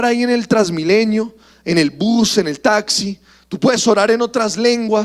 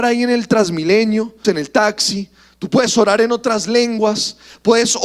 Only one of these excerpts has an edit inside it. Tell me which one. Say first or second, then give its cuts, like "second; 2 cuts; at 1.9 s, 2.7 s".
second; 1 cut; at 1.4 s